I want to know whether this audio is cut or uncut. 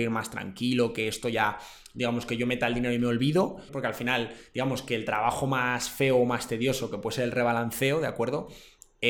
cut